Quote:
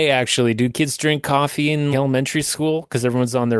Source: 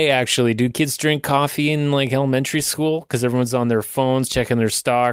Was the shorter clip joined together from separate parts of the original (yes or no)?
yes